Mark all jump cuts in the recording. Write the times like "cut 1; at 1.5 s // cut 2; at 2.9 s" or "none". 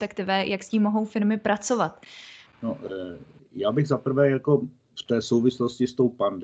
cut 1; at 2.5 s